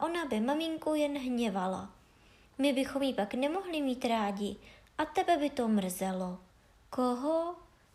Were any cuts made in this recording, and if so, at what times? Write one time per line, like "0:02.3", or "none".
0:06.7